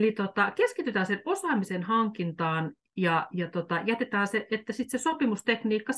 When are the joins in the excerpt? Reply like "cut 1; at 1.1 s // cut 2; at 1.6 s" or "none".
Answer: none